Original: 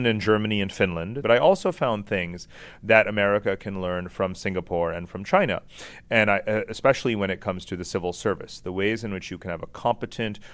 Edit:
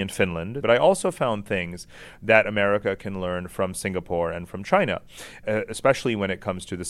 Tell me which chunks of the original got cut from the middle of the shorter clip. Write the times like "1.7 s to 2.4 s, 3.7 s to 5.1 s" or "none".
6.0 s to 6.4 s